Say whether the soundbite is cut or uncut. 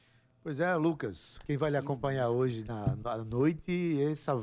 uncut